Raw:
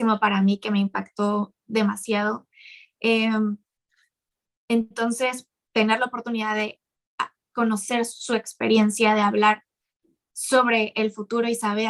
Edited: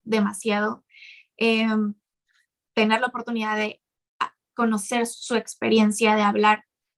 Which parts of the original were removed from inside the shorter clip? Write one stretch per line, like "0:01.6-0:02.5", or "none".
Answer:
0:04.3-0:05.6